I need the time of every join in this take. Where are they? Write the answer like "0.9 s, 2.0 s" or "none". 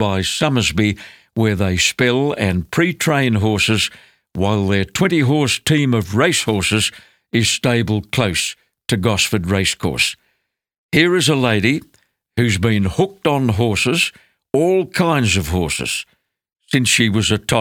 none